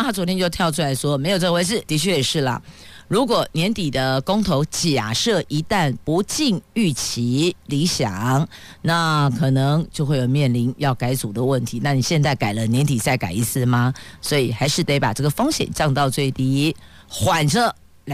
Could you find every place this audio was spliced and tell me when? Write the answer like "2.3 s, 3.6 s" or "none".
1.8 s